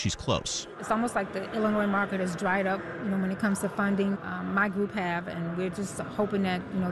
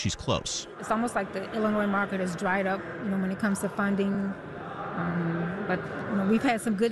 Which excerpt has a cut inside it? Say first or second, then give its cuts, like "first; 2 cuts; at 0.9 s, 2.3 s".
first; 1 cut; at 4.1 s